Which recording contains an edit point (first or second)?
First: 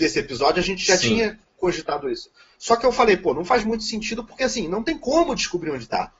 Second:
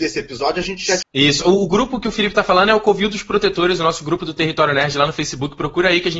second